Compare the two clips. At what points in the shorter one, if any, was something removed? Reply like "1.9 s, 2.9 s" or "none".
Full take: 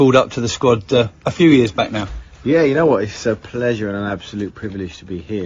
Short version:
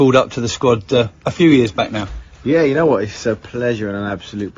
none